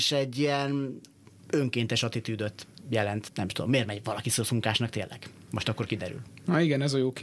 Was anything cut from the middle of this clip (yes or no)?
no